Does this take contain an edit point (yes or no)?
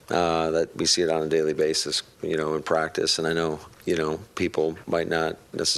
no